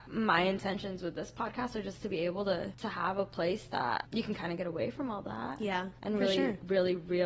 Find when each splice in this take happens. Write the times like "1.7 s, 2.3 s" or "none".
none